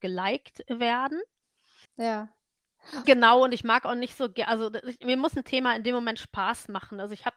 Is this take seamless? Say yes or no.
no